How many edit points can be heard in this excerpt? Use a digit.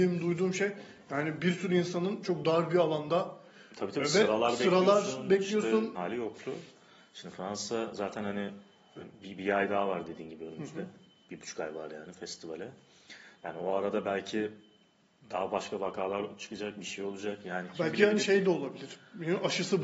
1